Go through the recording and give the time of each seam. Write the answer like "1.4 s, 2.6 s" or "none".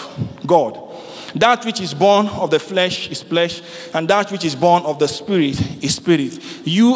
none

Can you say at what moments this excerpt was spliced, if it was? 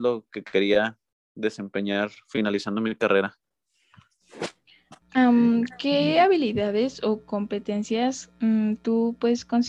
5.0 s

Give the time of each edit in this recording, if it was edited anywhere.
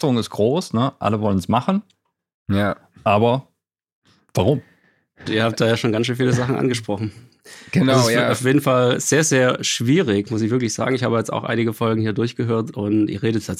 5.3 s

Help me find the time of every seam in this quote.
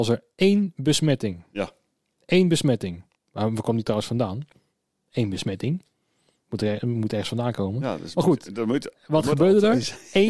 none

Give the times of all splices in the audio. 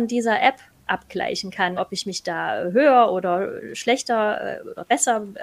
1.8 s

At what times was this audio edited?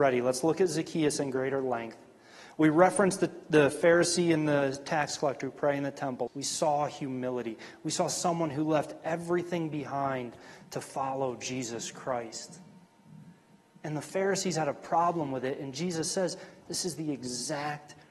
6.3 s, 16.6 s

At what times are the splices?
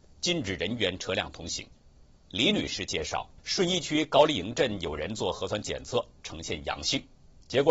2.2 s, 3.4 s

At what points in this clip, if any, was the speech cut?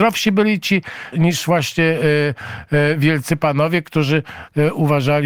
1.1 s

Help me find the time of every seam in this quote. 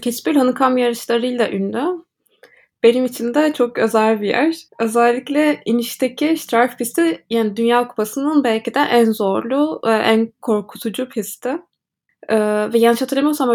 4.7 s, 12.1 s

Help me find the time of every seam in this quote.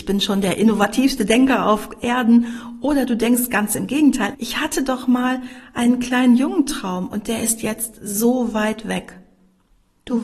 4.3 s

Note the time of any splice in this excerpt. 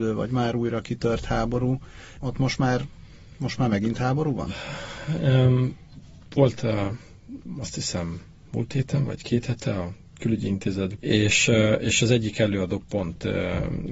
2.2 s, 11.0 s

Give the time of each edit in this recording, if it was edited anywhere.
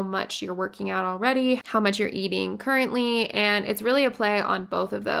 none

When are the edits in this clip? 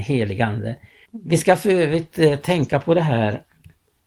1.1 s

